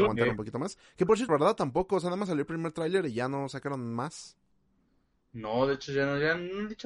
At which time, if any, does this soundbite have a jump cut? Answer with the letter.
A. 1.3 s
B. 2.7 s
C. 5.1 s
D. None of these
A